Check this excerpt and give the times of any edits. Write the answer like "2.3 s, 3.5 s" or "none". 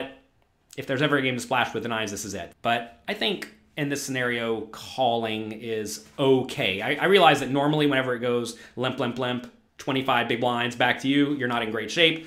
2.5 s, 9.7 s